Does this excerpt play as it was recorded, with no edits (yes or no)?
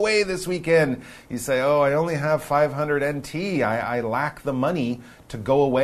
yes